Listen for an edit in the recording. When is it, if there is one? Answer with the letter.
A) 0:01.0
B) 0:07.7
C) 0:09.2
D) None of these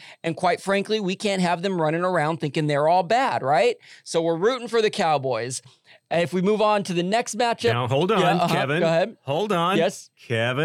D